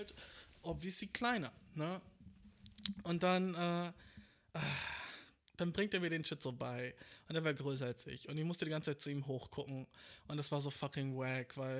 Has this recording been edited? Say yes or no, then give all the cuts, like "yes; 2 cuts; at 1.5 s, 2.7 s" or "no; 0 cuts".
no; 0 cuts